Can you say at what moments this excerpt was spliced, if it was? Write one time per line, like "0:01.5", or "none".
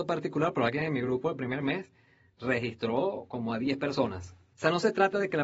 0:04.5